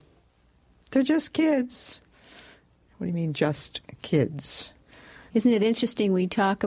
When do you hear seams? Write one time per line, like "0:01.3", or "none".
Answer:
0:05.3